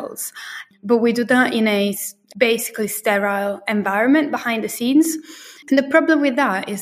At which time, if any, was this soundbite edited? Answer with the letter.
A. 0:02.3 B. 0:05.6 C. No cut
B